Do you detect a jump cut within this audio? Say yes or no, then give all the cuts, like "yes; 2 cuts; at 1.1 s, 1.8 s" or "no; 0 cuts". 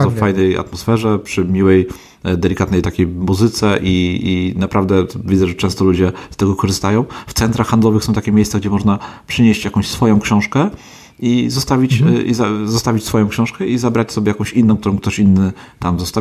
no; 0 cuts